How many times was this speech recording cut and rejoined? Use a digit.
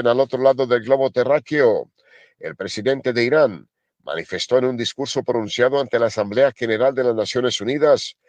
1